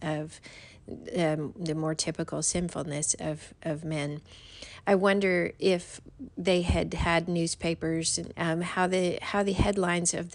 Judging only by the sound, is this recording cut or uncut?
cut